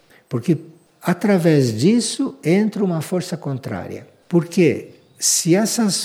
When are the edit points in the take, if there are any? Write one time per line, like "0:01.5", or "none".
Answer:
0:04.2